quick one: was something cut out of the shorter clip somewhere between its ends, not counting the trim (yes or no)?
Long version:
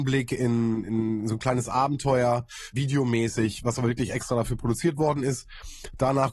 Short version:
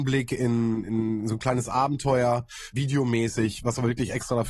no